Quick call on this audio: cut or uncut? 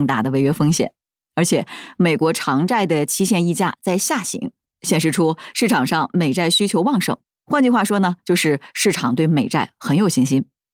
uncut